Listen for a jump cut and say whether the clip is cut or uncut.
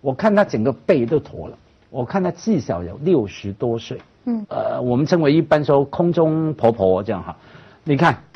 cut